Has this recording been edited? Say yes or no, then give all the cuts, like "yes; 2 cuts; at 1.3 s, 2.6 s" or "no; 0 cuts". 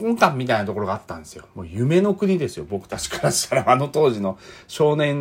no; 0 cuts